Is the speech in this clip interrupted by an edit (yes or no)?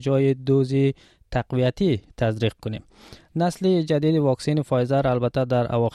no